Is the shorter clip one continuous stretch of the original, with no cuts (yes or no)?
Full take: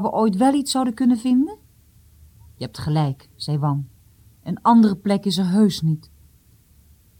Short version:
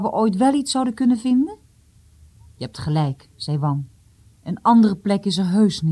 yes